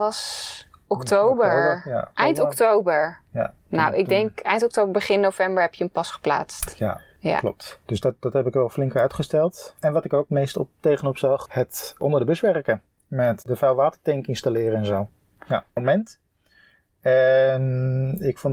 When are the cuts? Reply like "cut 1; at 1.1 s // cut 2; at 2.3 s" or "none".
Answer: cut 1; at 11.5 s // cut 2; at 15.8 s